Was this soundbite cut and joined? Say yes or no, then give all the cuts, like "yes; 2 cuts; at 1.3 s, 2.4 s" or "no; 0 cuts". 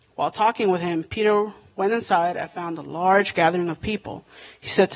no; 0 cuts